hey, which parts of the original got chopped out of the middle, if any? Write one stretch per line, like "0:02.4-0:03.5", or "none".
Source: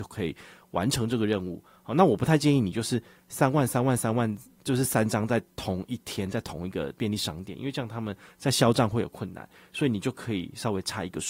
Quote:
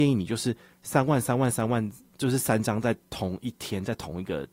none